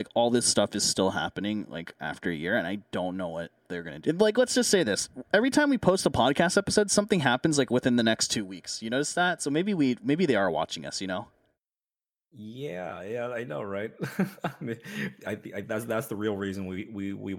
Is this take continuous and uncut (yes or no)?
no